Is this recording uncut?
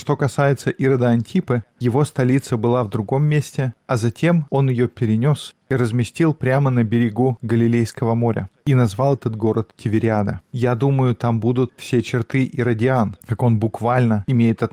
no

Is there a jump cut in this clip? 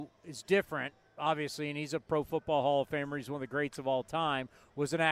no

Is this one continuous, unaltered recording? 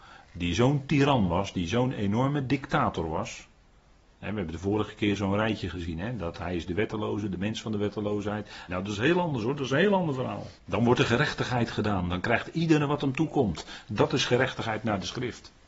no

